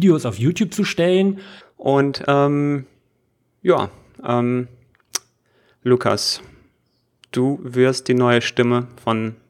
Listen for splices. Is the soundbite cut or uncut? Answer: cut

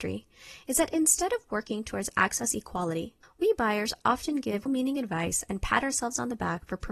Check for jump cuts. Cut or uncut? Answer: cut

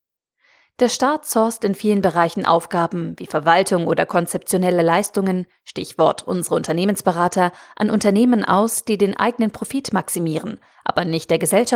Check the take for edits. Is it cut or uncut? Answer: uncut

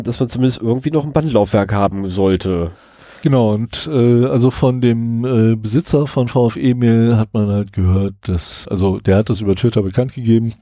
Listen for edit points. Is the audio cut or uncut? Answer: cut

